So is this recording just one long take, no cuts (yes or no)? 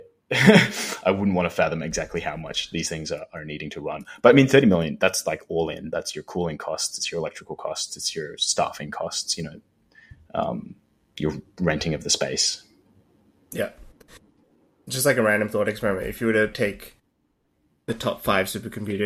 no